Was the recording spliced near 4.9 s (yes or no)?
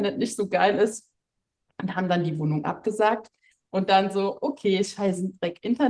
no